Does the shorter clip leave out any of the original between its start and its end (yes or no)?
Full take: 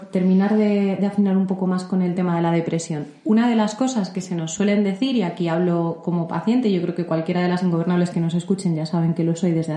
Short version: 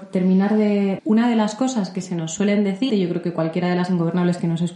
yes